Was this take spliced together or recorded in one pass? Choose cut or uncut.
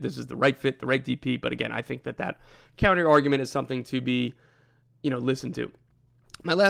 uncut